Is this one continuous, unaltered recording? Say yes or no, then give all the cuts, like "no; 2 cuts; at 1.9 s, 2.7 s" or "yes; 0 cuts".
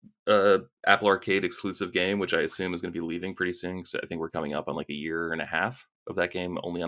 yes; 0 cuts